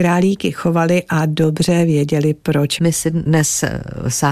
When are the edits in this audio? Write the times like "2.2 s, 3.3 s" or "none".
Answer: 2.8 s